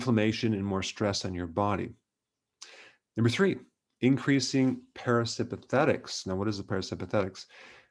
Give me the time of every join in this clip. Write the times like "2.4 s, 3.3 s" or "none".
none